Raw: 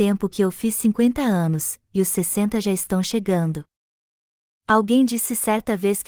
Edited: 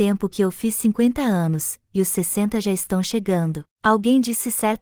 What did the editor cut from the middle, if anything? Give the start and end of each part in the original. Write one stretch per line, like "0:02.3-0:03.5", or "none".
0:03.7-0:04.6